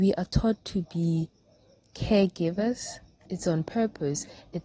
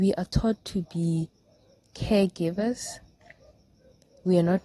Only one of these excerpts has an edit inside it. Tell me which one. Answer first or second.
first